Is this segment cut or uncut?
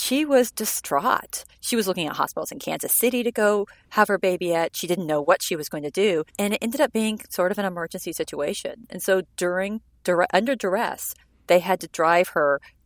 cut